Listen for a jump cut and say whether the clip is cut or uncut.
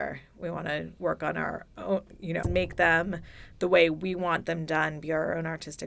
cut